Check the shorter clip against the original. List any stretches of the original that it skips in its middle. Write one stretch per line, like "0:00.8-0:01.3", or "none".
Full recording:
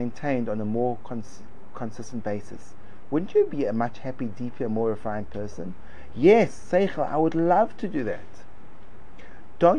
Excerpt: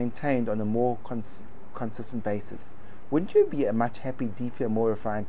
none